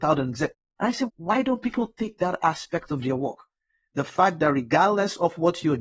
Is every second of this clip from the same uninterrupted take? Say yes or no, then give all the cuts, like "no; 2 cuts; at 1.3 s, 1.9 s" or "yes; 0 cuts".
no; 1 cut; at 1.1 s